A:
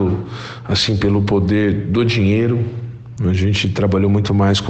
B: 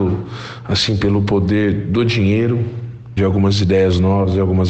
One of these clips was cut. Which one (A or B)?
B